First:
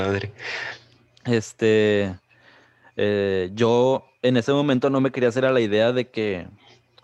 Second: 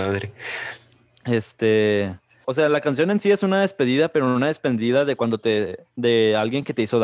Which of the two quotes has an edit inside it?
second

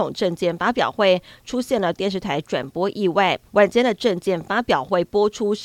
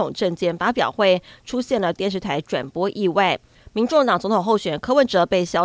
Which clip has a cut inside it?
first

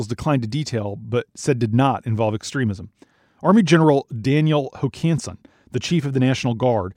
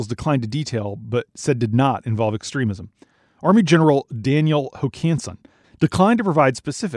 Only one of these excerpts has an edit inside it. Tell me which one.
second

